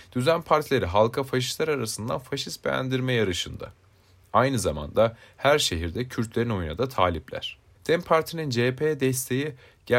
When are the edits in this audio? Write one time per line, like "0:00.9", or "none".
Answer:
0:07.8